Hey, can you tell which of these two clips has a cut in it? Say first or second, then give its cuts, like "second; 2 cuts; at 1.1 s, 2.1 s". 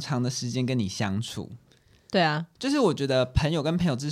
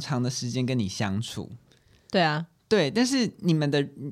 first; 1 cut; at 2.6 s